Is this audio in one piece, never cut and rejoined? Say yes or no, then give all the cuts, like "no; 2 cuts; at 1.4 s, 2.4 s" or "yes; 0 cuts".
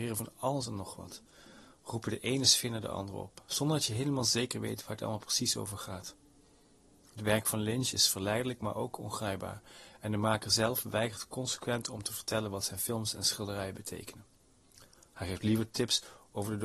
yes; 0 cuts